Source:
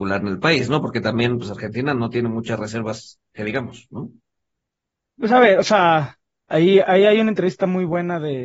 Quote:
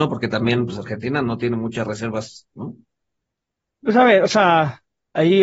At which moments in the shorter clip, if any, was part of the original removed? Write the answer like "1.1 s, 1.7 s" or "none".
2.5 s